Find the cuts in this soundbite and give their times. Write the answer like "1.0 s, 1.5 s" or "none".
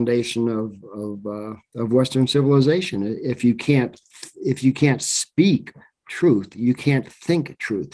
none